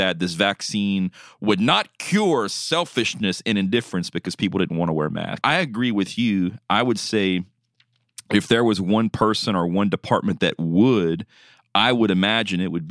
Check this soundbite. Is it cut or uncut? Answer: cut